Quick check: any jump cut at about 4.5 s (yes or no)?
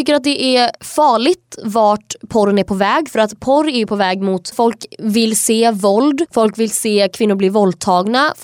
yes